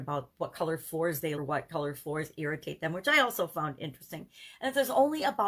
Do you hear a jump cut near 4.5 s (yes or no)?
no